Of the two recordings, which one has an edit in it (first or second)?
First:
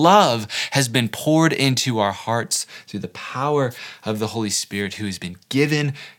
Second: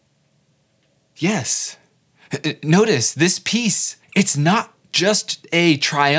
second